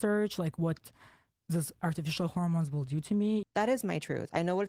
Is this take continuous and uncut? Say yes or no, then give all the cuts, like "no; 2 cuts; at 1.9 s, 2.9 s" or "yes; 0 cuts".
no; 1 cut; at 3.4 s